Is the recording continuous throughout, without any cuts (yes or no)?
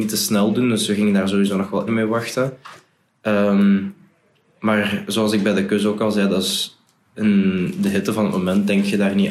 no